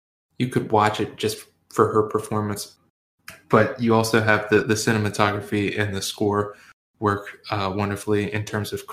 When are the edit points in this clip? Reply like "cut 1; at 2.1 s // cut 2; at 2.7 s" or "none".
none